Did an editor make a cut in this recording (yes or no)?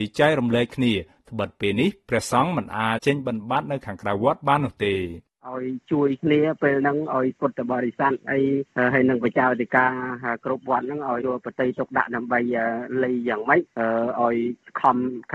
yes